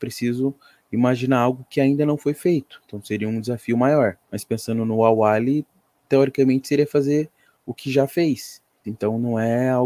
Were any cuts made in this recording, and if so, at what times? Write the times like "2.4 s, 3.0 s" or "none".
4.2 s, 8.8 s